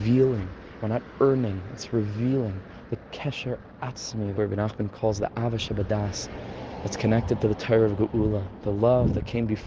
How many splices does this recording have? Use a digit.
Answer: 1